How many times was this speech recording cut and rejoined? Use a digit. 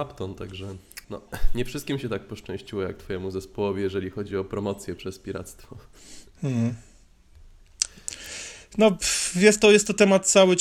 1